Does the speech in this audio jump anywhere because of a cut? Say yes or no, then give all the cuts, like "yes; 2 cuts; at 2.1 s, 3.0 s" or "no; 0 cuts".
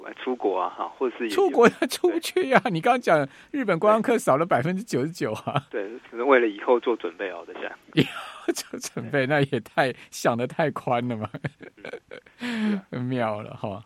no; 0 cuts